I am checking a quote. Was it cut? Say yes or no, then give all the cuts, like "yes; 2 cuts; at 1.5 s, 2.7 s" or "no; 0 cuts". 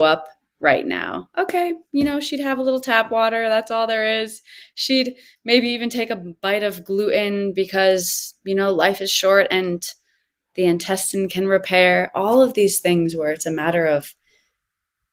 no; 0 cuts